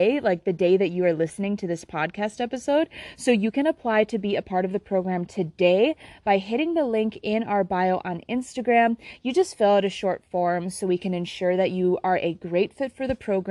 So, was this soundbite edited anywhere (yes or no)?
no